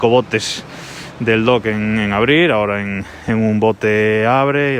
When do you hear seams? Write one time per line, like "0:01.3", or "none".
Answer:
none